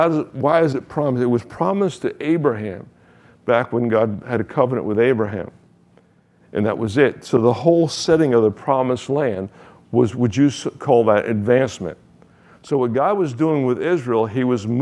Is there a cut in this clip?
no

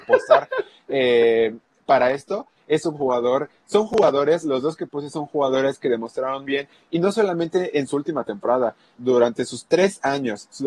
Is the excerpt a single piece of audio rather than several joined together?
no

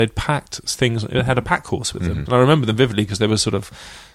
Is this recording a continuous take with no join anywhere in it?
no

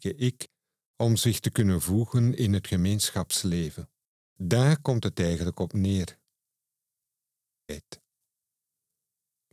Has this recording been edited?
yes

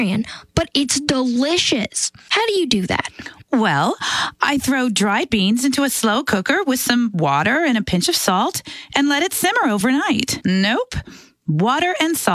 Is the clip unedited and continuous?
no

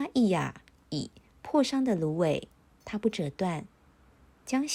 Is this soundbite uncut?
yes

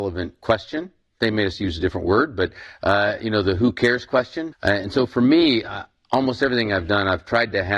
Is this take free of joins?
no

